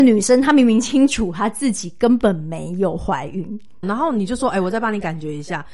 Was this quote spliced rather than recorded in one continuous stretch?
yes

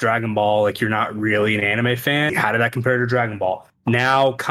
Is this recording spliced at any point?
yes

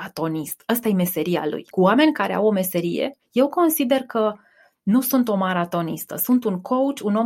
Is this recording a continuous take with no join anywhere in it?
no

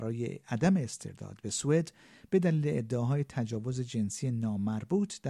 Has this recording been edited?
no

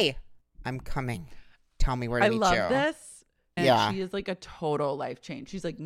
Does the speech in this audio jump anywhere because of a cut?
yes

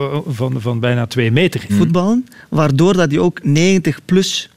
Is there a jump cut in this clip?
yes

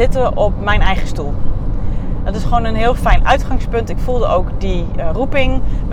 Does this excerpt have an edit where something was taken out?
no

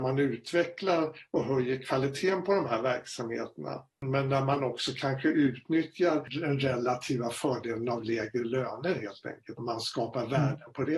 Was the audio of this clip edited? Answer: yes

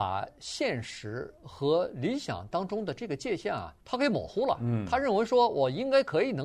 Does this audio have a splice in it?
yes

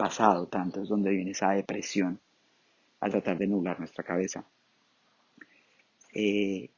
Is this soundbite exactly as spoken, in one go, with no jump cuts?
yes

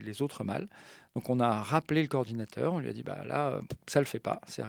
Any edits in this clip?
no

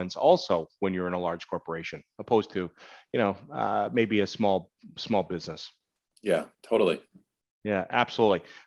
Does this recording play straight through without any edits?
yes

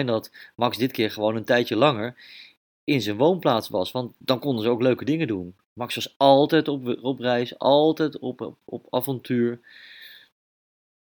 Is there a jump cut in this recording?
no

